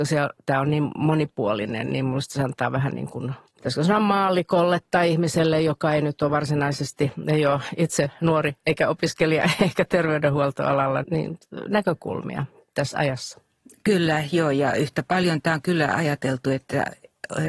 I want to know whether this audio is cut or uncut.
cut